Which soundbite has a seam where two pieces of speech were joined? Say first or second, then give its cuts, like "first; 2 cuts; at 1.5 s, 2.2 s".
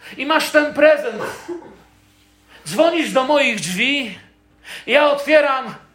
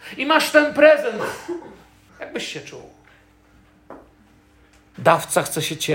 second; 2 cuts; at 2.1 s, 4.9 s